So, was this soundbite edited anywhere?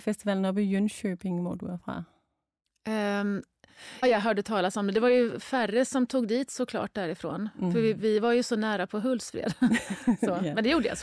yes; 1 cut; at 4.0 s

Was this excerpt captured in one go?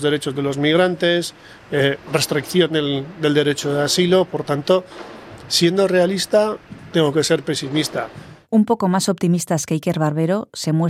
yes; 0 cuts

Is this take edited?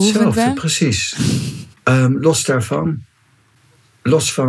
yes; 1 cut; at 1.7 s

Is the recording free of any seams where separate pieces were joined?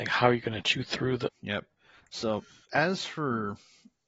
no; 1 cut; at 1.3 s

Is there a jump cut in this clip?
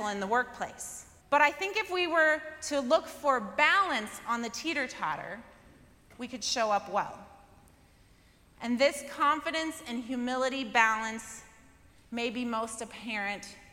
yes; 1 cut; at 1.2 s

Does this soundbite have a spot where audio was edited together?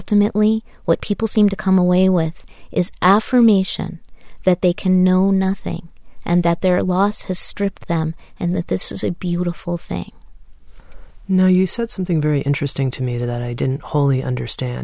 no; 0 cuts

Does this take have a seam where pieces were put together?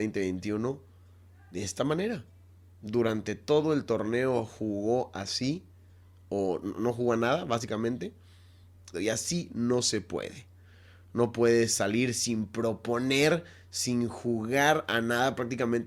yes; 1 cut; at 8.9 s

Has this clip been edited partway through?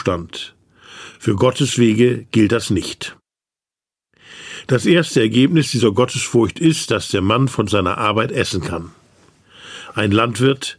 no; 0 cuts

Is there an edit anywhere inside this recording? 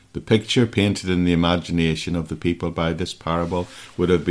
no; 0 cuts

